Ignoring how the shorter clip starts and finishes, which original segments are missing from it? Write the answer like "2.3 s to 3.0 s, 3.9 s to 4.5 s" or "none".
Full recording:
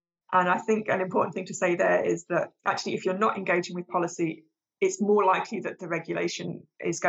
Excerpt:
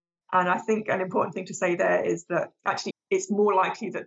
2.9 s to 4.6 s